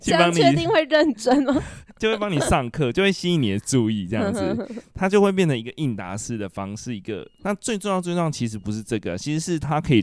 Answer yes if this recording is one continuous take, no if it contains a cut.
no